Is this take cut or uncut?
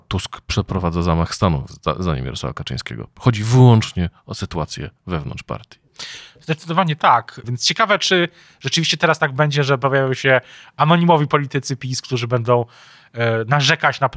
cut